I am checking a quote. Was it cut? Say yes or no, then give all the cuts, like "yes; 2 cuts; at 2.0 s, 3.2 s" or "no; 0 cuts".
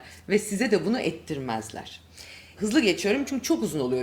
yes; 1 cut; at 2.6 s